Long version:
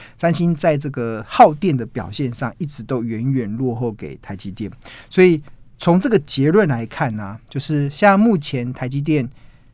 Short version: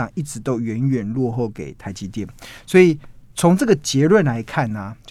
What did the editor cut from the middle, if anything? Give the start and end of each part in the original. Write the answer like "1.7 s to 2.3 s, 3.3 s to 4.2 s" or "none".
none